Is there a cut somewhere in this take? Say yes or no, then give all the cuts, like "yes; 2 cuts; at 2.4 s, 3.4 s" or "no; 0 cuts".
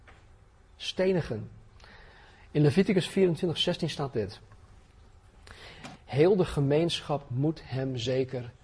yes; 1 cut; at 6.0 s